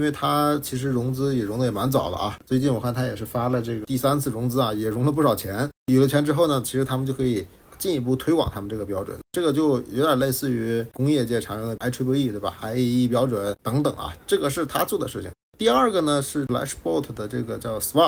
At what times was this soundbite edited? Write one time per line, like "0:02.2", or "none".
none

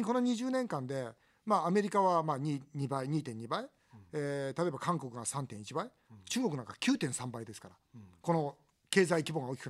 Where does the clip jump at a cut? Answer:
none

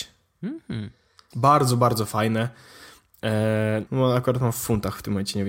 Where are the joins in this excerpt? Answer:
0:01.3
0:03.9

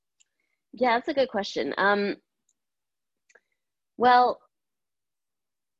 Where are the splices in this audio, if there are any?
none

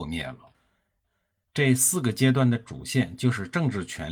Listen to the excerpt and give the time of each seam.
0:01.4

